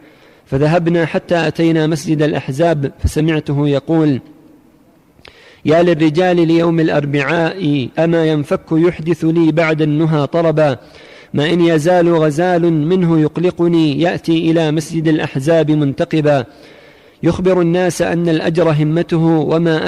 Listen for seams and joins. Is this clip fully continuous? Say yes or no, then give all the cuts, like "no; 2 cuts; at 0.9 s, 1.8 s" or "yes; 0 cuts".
no; 1 cut; at 8.0 s